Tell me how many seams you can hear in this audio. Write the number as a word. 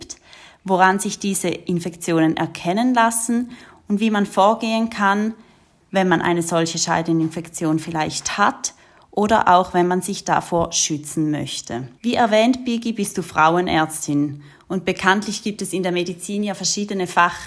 one